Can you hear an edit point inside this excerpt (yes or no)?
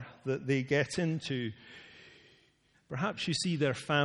yes